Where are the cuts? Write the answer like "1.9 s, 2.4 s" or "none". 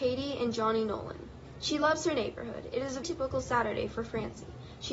3.0 s